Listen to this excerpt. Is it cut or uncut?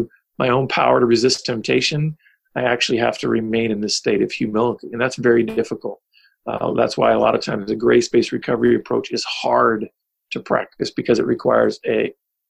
uncut